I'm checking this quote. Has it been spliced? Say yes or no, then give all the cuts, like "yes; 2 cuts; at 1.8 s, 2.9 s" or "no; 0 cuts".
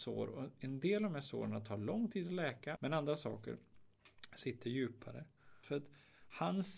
yes; 2 cuts; at 2.8 s, 5.6 s